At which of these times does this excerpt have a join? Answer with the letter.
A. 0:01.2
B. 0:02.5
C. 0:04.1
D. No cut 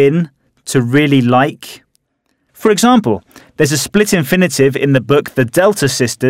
B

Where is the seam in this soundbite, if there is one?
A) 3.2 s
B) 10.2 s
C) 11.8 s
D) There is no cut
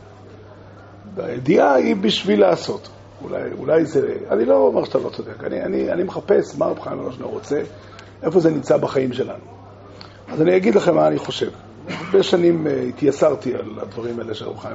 A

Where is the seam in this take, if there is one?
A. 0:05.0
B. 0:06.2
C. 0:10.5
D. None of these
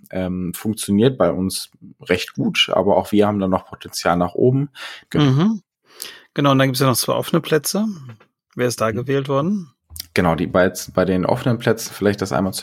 A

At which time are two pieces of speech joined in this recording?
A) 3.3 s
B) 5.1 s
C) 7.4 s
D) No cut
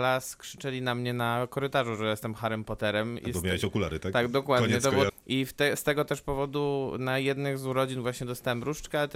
B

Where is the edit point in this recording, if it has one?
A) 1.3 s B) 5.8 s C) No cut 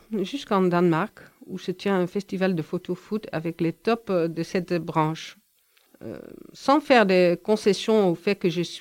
B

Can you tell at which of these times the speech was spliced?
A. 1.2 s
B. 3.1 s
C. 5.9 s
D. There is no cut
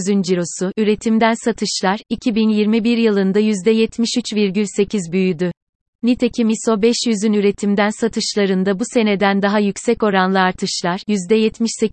C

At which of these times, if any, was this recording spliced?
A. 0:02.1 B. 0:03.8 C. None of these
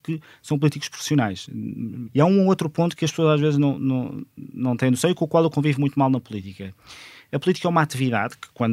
A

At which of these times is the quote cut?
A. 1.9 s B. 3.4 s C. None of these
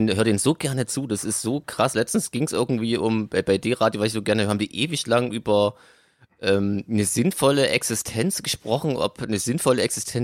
C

